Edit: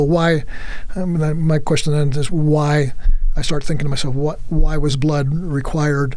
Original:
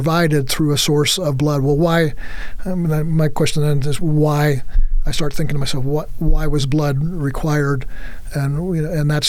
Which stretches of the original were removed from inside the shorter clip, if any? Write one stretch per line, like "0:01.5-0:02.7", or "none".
none